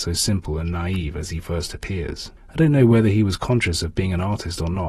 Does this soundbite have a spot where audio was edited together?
no; 0 cuts

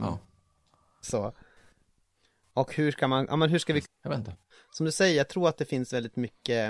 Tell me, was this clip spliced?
yes; 2 cuts; at 1.0 s, 3.8 s

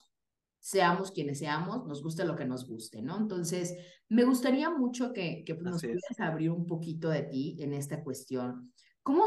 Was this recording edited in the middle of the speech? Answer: no; 0 cuts

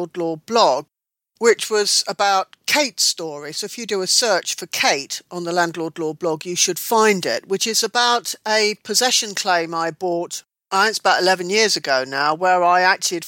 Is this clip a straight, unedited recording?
yes; 0 cuts

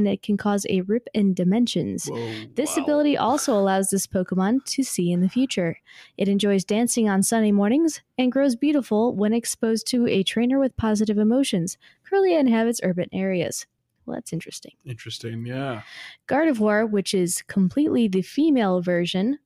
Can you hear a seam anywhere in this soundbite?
no; 0 cuts

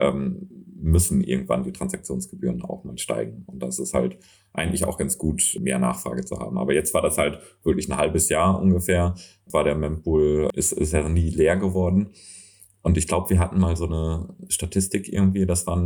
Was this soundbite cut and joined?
no; 0 cuts

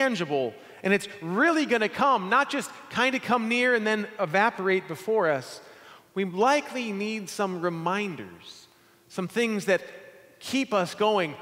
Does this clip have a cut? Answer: no; 0 cuts

